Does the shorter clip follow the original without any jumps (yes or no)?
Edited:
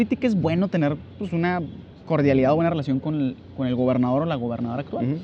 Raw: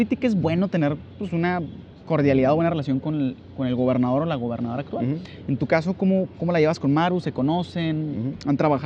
yes